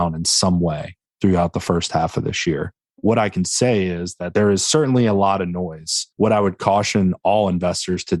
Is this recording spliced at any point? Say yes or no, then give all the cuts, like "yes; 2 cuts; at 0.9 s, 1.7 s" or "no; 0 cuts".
yes; 1 cut; at 2.9 s